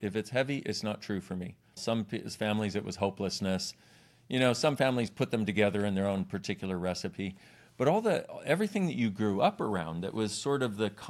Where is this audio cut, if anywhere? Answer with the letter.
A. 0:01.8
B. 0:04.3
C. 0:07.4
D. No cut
A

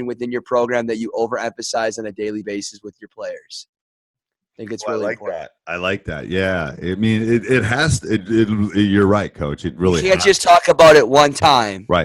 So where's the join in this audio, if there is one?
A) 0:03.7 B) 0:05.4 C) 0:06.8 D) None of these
D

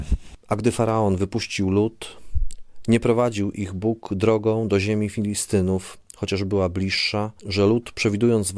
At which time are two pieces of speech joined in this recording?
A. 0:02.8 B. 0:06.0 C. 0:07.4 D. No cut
C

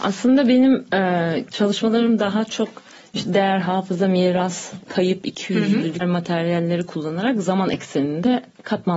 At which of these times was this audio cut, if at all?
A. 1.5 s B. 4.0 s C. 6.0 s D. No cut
C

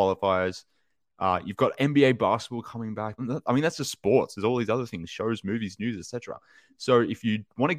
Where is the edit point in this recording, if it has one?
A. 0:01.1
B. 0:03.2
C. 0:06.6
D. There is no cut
B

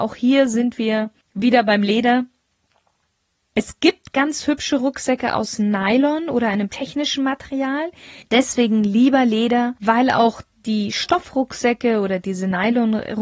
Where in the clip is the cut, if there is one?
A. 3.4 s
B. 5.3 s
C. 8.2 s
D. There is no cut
C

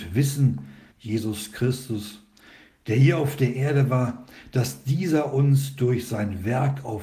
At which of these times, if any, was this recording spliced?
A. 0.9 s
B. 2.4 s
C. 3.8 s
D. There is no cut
A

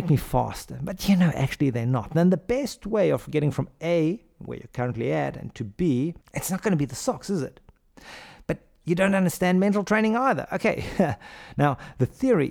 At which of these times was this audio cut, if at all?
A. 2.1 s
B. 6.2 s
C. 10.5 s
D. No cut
B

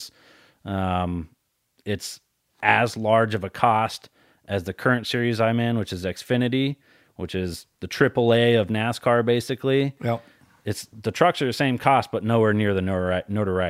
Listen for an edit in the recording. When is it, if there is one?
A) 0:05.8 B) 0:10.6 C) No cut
C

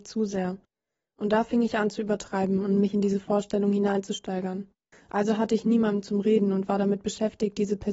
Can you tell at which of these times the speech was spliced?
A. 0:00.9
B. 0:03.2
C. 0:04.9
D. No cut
C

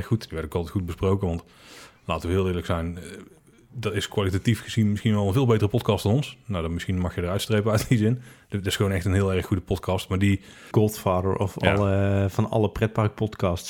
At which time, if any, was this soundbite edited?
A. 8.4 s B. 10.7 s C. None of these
B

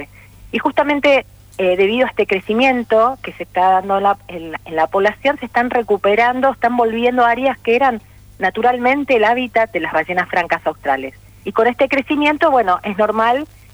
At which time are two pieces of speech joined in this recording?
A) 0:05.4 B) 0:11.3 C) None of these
B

